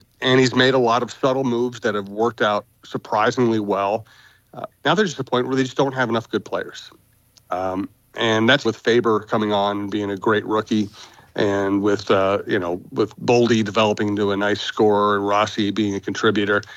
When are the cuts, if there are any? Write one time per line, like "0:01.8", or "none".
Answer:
0:04.7
0:08.6

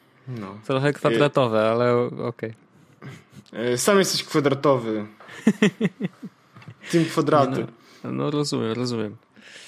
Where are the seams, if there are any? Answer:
none

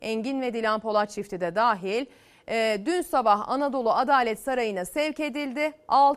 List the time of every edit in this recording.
none

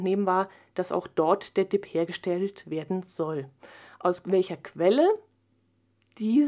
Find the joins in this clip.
none

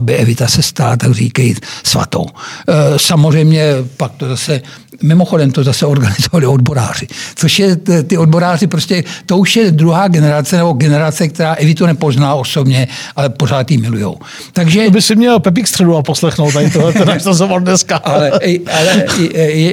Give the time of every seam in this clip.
none

